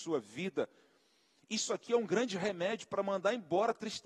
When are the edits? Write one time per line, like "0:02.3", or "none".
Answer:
none